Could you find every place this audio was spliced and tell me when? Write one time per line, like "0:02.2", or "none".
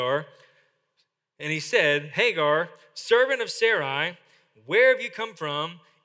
none